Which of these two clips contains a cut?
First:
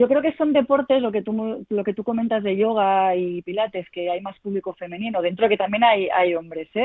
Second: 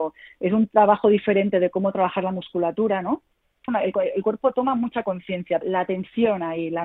second; 2 cuts; at 3.7 s, 5.6 s

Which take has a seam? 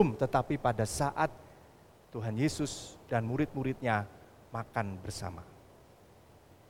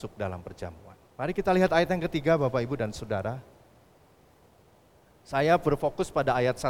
second; 1 cut; at 1.1 s

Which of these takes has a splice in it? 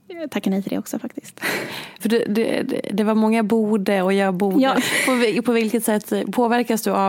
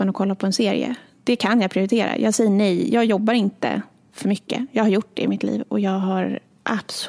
first; 2 cuts; at 2.0 s, 4.7 s

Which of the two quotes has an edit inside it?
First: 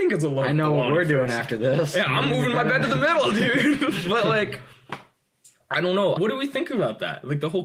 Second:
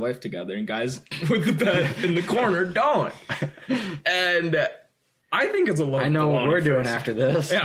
first; 1 cut; at 6.2 s

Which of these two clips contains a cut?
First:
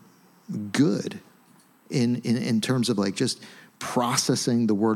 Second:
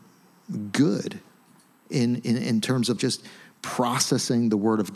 second; 1 cut; at 3.0 s

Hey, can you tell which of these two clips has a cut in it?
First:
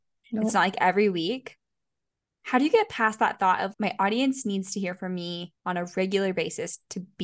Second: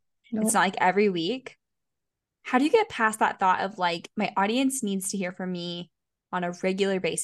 first; 2 cuts; at 3.7 s, 5.6 s

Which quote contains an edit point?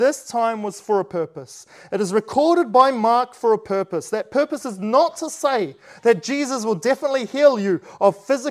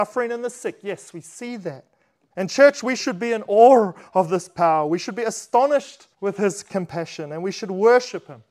second; 2 cuts; at 2.3 s, 6.1 s

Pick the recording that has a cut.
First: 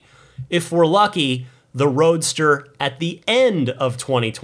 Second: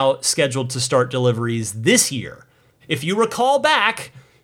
second; 1 cut; at 2.8 s

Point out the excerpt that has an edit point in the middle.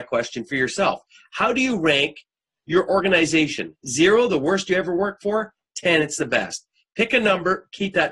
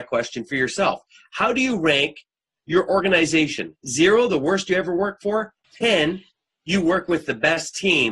second; 1 cut; at 5.6 s

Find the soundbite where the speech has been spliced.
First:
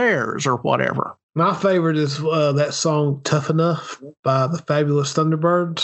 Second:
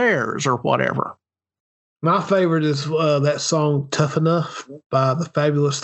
first; 1 cut; at 1.2 s

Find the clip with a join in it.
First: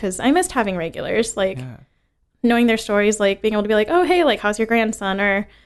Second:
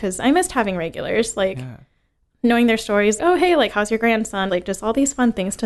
second; 2 cuts; at 3.2 s, 4.5 s

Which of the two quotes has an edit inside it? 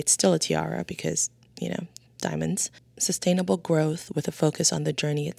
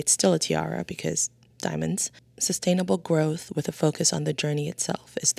second; 1 cut; at 1.5 s

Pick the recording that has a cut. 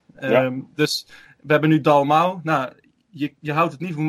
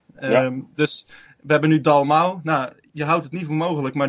second; 1 cut; at 2.9 s

